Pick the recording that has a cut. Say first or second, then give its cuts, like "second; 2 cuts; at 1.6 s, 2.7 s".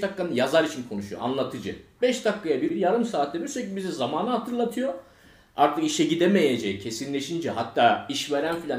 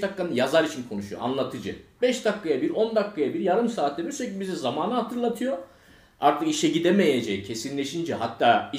first; 1 cut; at 2.7 s